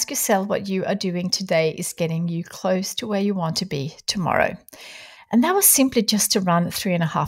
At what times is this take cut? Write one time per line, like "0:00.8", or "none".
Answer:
0:05.2